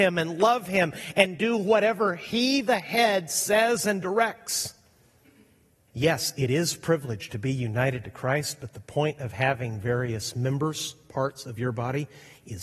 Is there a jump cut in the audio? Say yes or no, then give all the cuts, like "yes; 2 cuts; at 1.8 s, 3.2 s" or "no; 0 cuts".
yes; 1 cut; at 5.9 s